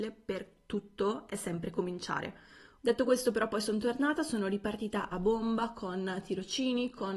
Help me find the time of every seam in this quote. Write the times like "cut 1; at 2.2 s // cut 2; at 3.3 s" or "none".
cut 1; at 2.8 s